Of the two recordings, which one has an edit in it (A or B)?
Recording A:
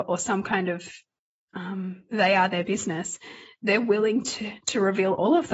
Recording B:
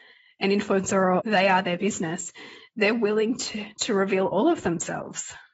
B